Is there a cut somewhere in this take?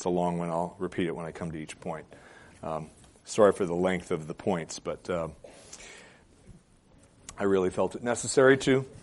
no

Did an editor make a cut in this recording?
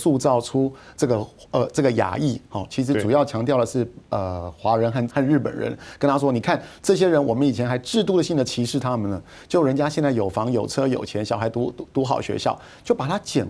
yes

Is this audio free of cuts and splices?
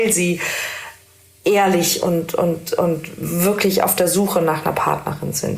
yes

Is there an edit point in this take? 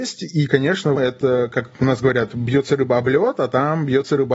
yes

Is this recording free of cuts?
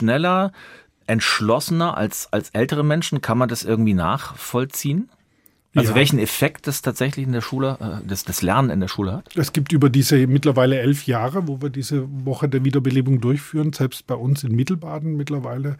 yes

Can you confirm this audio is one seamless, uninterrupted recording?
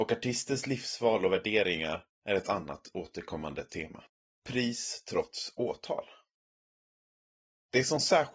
no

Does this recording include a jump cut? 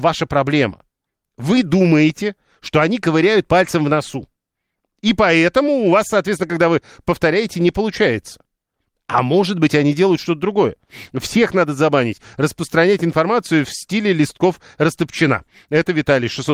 no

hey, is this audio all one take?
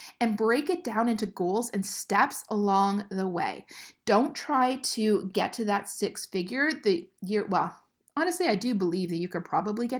yes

